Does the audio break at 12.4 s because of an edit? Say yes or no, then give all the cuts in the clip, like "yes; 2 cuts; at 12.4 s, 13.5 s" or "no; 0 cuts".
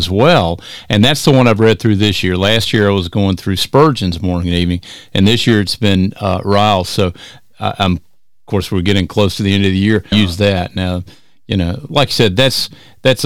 no; 1 cut; at 10.1 s